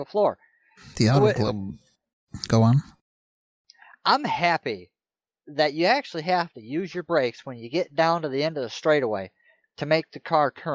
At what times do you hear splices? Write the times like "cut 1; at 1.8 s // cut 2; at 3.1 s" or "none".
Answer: none